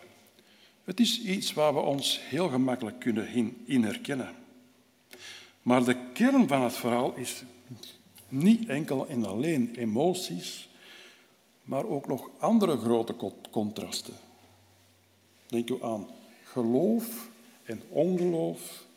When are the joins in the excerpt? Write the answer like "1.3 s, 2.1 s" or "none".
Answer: none